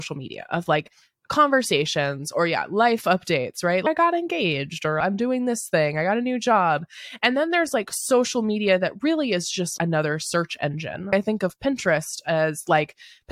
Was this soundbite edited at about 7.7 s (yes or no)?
no